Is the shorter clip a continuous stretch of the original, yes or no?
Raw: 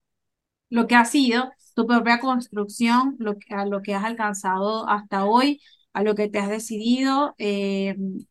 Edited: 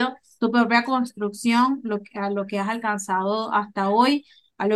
yes